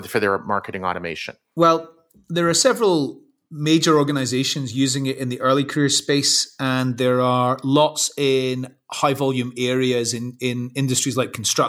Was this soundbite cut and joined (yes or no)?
no